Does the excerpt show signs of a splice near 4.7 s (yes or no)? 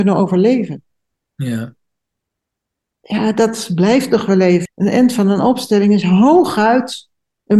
yes